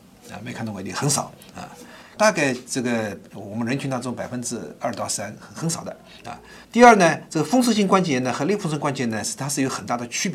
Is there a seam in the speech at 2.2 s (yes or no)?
yes